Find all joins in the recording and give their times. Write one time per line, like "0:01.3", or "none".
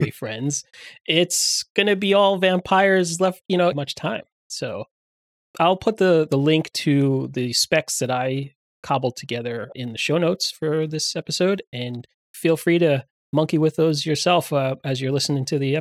0:03.7
0:09.7

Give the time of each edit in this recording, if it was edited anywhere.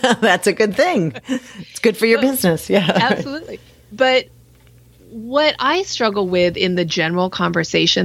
none

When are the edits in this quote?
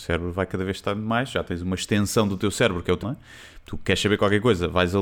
0:03.0

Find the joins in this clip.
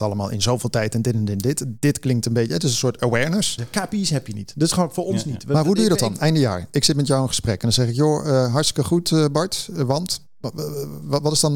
0:03.6

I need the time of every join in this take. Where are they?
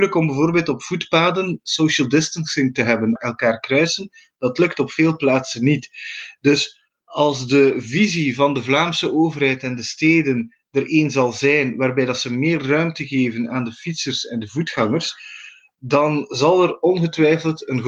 0:03.2

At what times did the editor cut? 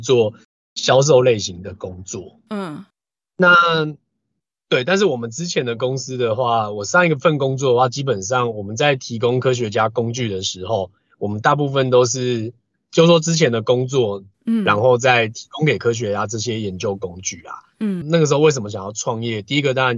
0:14.3
0:18.0

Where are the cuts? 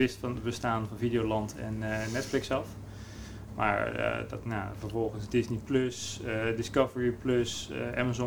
none

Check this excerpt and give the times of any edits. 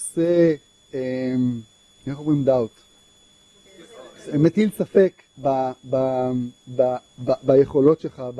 0:05.3

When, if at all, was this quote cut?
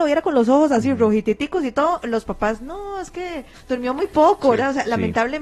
0:03.5

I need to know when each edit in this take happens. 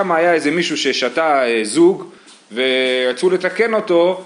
none

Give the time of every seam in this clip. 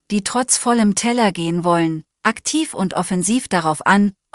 0:02.1

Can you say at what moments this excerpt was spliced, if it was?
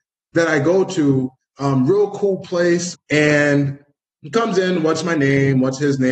0:02.9

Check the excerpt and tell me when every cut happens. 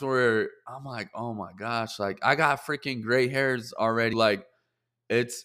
0:04.1

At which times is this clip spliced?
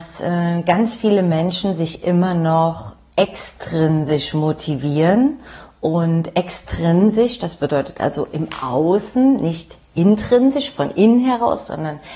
none

